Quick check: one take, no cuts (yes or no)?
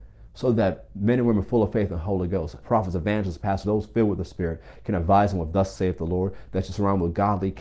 no